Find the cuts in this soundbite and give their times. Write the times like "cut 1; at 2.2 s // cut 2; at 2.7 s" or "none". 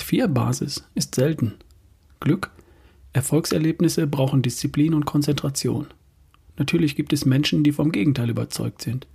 none